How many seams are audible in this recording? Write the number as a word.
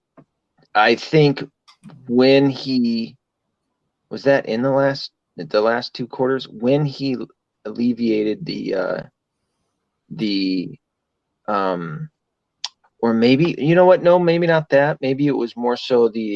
one